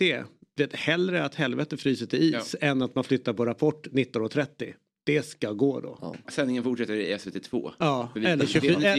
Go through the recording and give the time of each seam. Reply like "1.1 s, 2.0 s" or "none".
6.2 s